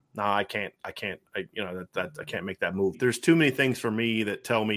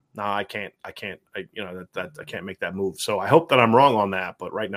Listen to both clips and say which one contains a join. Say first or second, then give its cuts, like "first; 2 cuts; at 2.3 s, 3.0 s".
first; 1 cut; at 2.9 s